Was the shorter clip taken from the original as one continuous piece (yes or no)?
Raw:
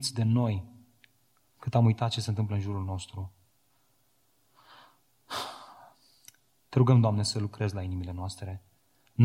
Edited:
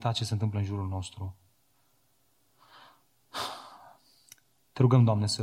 yes